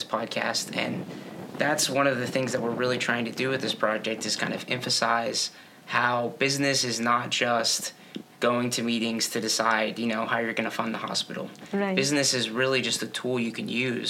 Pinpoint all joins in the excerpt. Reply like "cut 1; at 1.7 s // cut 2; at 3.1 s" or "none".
none